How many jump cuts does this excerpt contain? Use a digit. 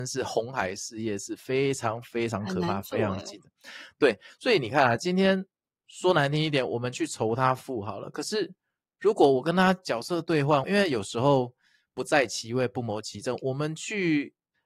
1